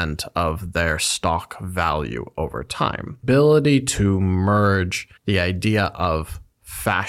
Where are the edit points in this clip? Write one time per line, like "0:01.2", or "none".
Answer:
0:03.2
0:05.2